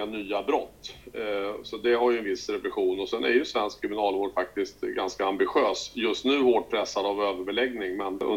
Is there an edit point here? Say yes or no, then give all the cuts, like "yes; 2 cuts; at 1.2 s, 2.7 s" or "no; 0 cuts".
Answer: no; 0 cuts